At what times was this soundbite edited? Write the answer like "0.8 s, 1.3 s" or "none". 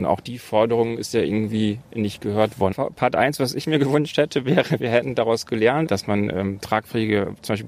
2.7 s